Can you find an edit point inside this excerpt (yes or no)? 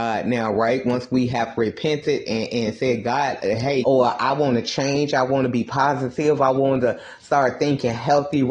yes